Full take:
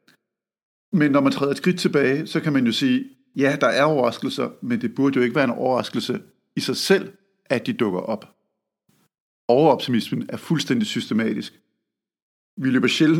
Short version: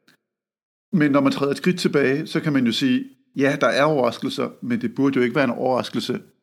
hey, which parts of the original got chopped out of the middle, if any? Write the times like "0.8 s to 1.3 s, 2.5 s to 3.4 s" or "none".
none